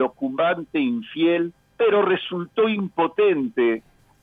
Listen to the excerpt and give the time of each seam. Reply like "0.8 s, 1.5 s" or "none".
1.7 s